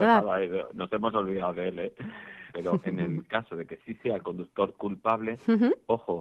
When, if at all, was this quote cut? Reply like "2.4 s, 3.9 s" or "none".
2.5 s